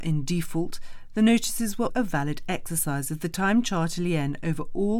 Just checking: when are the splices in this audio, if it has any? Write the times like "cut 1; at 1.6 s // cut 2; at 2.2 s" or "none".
cut 1; at 1.9 s